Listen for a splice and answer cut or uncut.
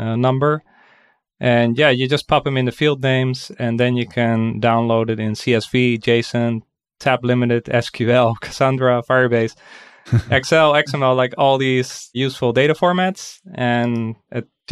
uncut